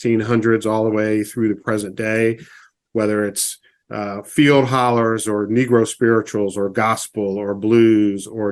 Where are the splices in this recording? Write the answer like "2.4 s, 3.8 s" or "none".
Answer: none